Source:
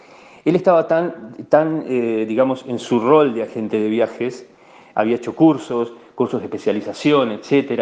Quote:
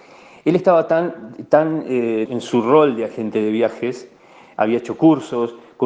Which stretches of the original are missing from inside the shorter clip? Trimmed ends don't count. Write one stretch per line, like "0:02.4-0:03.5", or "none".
0:02.3-0:02.6